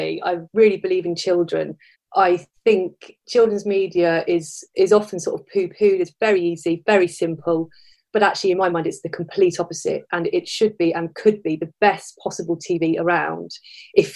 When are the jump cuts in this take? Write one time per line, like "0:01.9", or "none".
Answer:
0:01.9